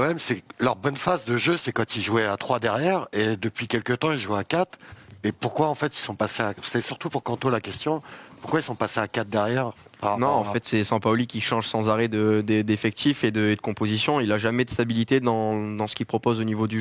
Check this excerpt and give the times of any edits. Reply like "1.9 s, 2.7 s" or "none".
none